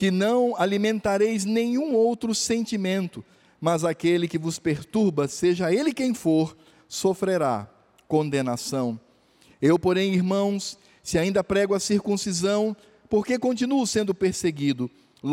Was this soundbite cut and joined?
no; 0 cuts

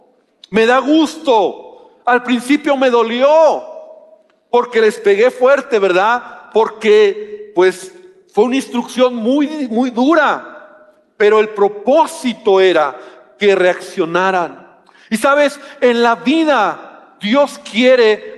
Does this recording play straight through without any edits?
yes; 0 cuts

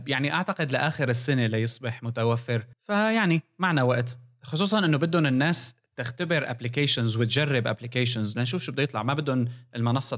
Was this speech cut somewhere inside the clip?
yes; 1 cut; at 2.7 s

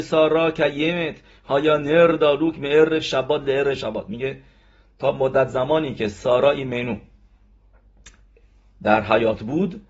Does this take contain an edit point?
no; 0 cuts

